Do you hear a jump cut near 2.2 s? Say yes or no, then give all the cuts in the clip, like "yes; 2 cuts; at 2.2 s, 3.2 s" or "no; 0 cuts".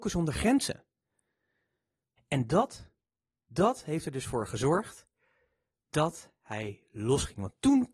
yes; 1 cut; at 2.2 s